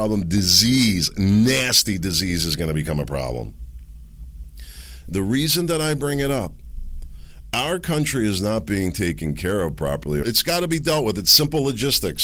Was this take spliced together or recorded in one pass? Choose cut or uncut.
cut